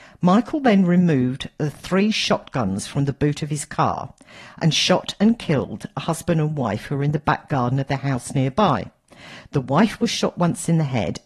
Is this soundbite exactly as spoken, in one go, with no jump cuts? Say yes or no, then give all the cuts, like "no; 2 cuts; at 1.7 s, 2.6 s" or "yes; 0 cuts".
yes; 0 cuts